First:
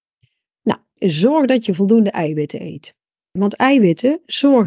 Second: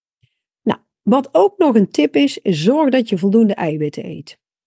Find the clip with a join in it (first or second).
first